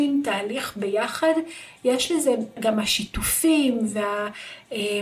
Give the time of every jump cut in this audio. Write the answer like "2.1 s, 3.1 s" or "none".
2.6 s